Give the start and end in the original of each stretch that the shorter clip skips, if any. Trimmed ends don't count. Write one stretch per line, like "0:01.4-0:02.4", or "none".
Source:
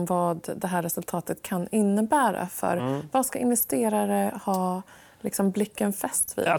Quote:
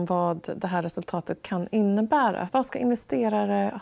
0:02.5-0:03.1

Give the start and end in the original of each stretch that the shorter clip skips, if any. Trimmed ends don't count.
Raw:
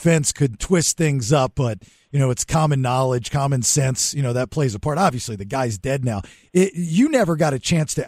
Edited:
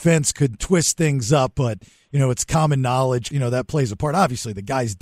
0:03.3-0:04.1

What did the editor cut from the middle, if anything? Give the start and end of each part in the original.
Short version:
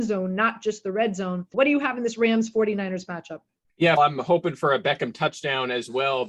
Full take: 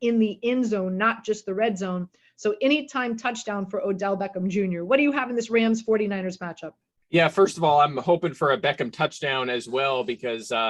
0:02.2-0:04.9
0:07.3-0:07.8

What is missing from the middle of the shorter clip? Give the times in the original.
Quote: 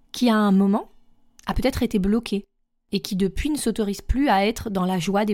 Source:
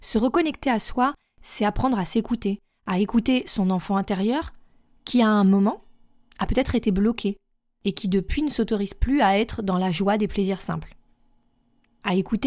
none

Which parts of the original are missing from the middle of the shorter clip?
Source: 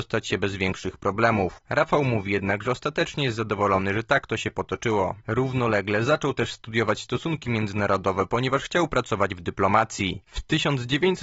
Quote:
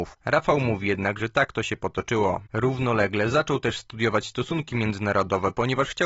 0:02.6-0:03.9

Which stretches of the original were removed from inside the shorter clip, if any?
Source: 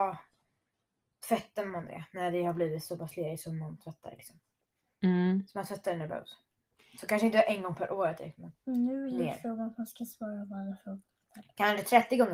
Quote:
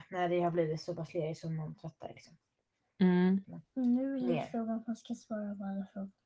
0:05.5-0:08.3

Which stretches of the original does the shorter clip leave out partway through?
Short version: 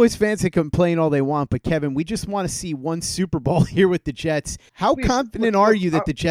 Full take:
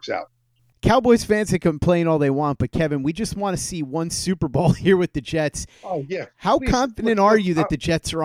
0:05.8-0:06.3

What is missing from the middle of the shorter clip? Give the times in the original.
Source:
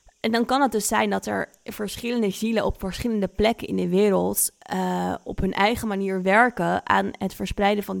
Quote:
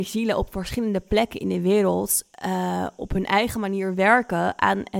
none

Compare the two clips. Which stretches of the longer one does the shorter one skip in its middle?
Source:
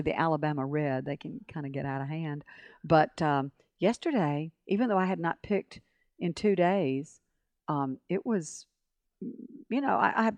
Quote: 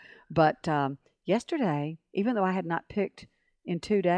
none

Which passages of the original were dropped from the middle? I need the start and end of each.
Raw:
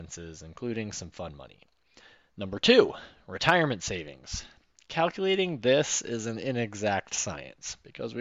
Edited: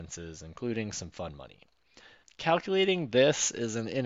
0:02.2-0:04.7

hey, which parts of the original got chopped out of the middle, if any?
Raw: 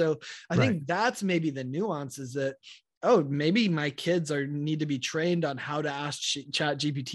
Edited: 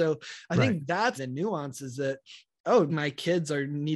0:01.2-0:01.5
0:03.3-0:03.7

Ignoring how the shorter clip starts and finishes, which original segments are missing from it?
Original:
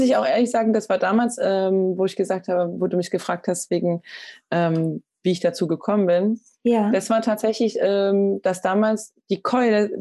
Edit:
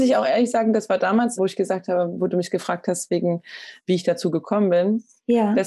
0:01.4-0:02.0
0:04.4-0:05.1

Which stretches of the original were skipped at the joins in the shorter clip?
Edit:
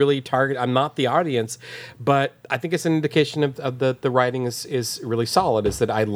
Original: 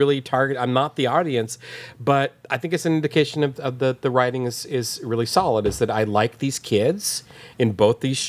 none

